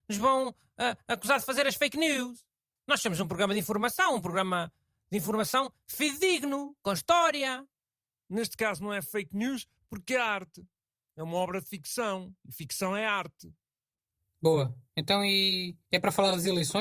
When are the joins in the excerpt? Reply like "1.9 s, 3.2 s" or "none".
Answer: none